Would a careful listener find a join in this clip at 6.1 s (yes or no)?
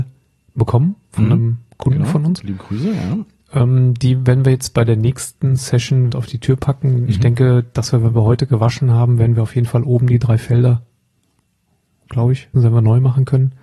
yes